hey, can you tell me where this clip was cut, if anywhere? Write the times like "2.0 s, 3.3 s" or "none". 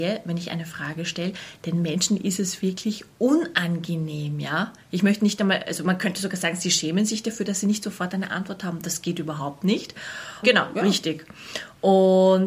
10.4 s